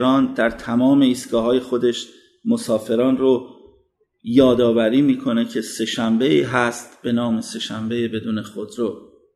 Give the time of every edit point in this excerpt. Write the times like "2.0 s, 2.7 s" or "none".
none